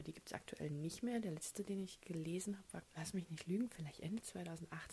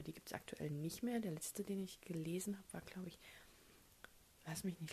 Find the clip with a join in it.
first; 1 cut; at 2.8 s

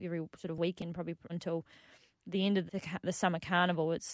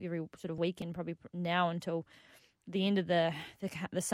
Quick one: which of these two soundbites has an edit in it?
first; 2 cuts; at 1.3 s, 2.7 s

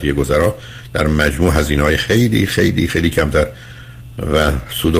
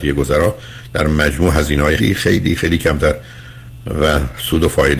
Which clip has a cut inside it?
second; 1 cut; at 2.0 s

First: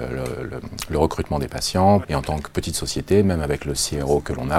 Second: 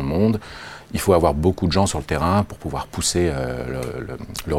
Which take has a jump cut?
first; 1 cut; at 2.0 s

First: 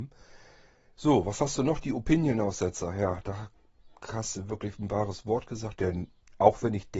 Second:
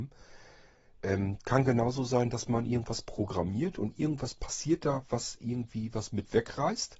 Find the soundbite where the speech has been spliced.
first; 2 cuts; at 0.9 s, 5.7 s

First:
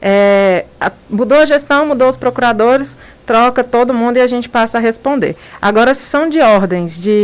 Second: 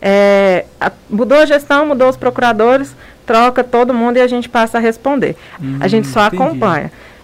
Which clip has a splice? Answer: second; 1 cut; at 5.6 s

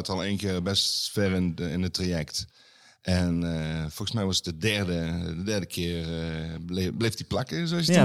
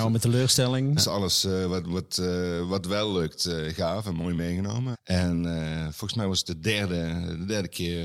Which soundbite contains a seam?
second; 2 cuts; at 1.0 s, 4.9 s

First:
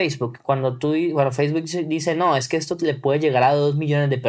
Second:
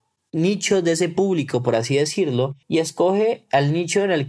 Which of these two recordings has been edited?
second; 1 cut; at 2.6 s

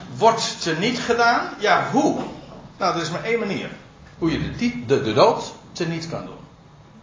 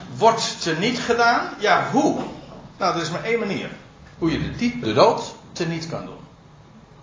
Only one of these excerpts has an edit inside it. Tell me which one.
second; 1 cut; at 4.8 s

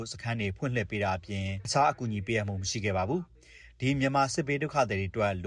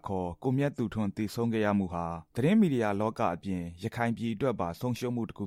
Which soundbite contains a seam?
second; 1 cut; at 2.3 s

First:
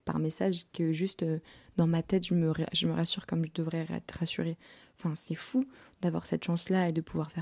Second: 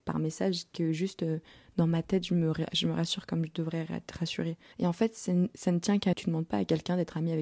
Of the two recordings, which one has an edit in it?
second; 2 cuts; at 4.7 s, 6.1 s

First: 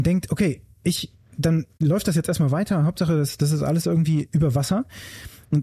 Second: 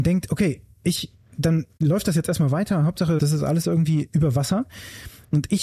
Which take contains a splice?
second; 1 cut; at 3.2 s

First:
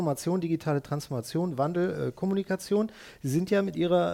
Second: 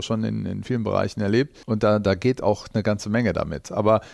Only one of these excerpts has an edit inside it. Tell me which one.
second; 1 cut; at 1.6 s

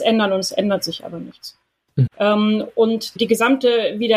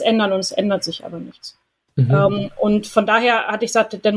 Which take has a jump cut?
first; 2 cuts; at 2.1 s, 3.2 s

